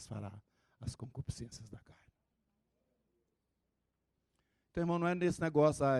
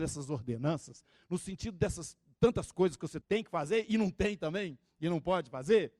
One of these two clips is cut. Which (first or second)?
second